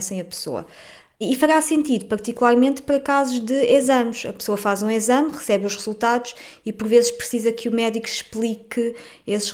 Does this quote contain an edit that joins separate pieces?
no; 0 cuts

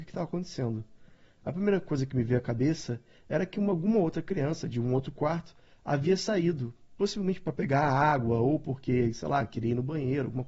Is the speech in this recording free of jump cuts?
yes; 0 cuts

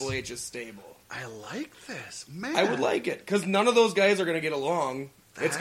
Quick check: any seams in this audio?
no; 0 cuts

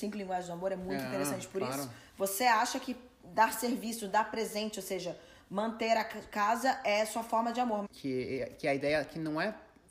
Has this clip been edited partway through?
yes; 1 cut; at 7.8 s

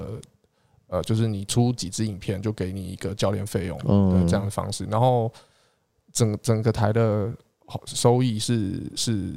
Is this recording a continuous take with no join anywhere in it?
yes; 0 cuts

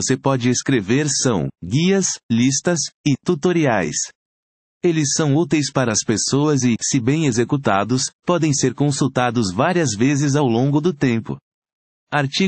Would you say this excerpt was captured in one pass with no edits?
yes; 0 cuts

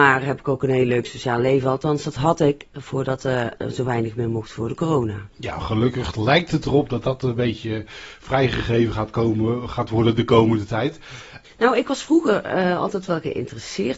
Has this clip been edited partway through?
yes; 1 cut; at 11.4 s

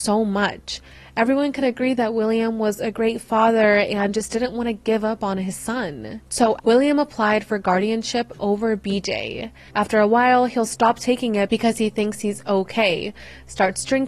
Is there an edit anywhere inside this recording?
yes; 2 cuts; at 6.6 s, 9.7 s

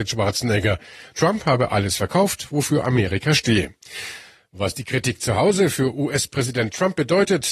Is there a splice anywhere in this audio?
yes; 1 cut; at 1.1 s

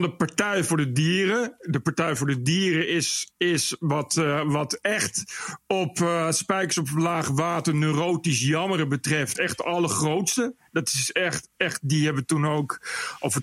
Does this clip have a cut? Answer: no; 0 cuts

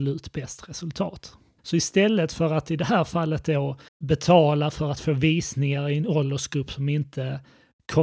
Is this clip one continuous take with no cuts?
no; 2 cuts; at 1.6 s, 3.9 s

